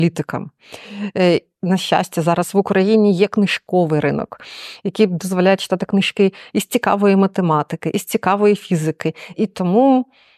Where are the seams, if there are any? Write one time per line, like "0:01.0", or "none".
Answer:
0:01.6
0:09.3